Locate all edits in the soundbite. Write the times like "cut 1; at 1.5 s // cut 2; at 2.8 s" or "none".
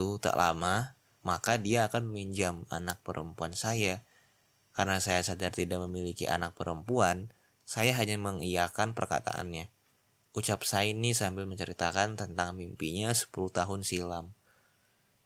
cut 1; at 1.2 s